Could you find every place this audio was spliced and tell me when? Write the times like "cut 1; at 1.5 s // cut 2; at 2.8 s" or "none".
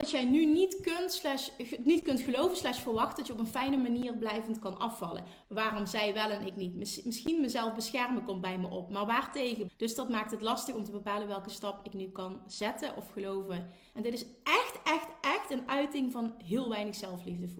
cut 1; at 5.4 s // cut 2; at 9.7 s // cut 3; at 13.9 s